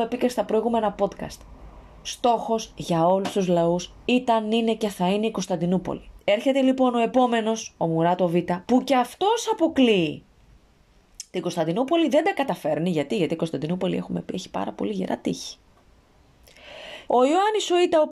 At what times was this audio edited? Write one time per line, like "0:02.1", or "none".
0:06.2
0:17.1